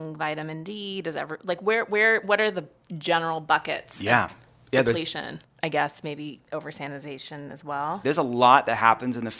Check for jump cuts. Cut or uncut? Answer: cut